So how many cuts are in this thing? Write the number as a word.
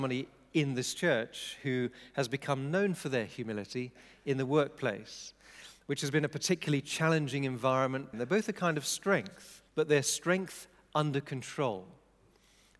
two